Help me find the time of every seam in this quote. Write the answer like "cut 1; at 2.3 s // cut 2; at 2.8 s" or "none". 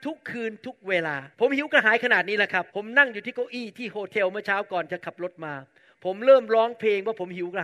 cut 1; at 1.3 s // cut 2; at 2.7 s